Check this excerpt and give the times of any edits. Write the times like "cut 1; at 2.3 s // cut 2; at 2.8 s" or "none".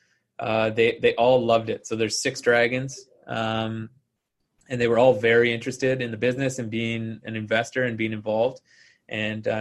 none